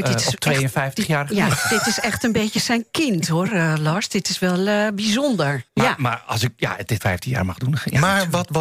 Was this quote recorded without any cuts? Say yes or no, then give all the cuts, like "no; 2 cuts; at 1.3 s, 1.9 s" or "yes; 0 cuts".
no; 2 cuts; at 5.7 s, 7.0 s